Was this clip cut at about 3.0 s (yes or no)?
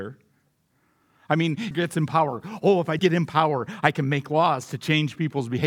yes